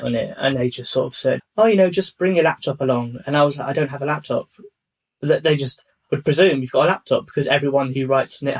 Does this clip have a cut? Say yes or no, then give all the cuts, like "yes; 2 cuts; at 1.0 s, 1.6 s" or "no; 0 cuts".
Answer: yes; 1 cut; at 1.4 s